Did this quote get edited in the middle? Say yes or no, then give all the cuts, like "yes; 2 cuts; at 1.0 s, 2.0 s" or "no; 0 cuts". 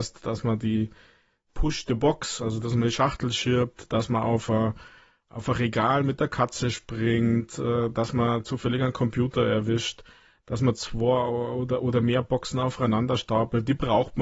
no; 0 cuts